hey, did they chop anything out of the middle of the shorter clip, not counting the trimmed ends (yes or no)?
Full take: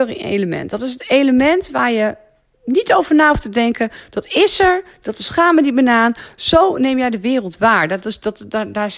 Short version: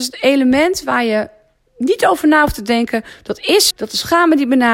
yes